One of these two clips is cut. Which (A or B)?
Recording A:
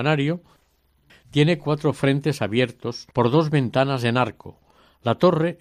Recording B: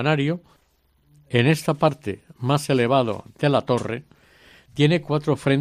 A